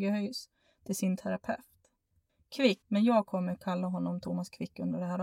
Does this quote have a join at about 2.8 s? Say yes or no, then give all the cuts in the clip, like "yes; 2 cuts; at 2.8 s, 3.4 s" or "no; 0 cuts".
yes; 1 cut; at 2.8 s